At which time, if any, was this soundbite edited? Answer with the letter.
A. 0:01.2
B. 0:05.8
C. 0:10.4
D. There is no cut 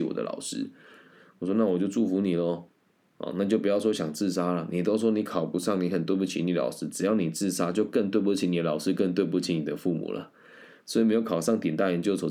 D